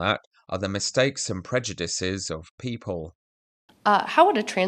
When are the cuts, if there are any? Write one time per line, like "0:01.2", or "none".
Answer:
0:03.7